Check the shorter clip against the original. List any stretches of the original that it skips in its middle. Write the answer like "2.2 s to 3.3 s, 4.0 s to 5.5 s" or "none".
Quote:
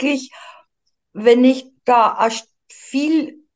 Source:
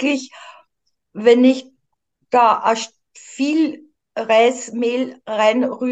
1.8 s to 2.2 s